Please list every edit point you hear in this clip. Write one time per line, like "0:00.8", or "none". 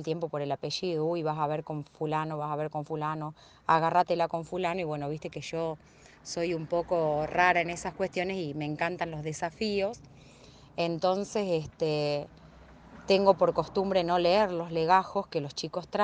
none